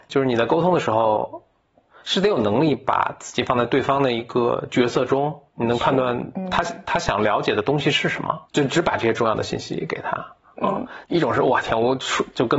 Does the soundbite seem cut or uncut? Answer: cut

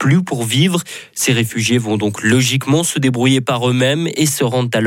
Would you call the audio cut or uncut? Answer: uncut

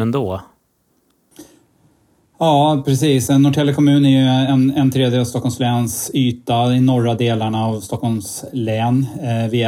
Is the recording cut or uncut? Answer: uncut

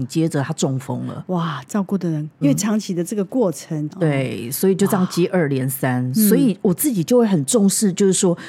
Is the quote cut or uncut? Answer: cut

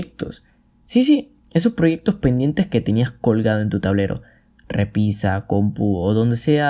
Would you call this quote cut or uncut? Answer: uncut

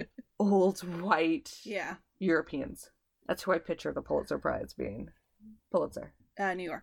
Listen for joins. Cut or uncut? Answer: cut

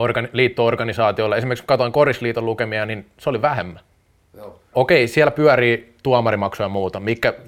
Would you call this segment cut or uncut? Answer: cut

